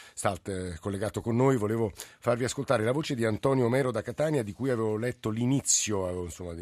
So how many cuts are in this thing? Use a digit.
0